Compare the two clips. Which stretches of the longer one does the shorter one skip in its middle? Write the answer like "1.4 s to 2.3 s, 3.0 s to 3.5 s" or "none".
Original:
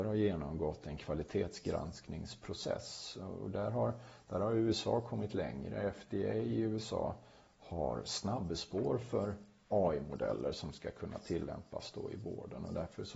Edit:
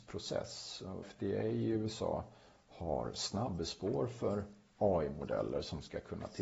3.4 s to 5.9 s